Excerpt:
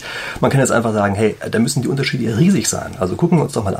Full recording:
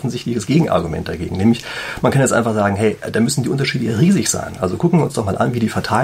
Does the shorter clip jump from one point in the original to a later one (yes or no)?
no